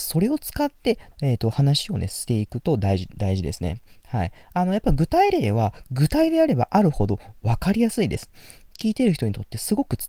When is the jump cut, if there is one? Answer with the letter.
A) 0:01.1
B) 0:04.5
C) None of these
A